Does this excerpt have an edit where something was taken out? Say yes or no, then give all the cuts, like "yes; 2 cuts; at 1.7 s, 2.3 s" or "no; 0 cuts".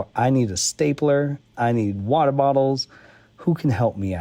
yes; 1 cut; at 1.4 s